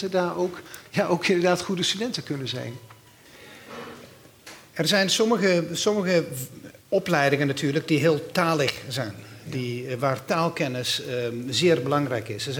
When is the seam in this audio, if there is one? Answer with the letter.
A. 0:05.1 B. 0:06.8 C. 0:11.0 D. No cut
B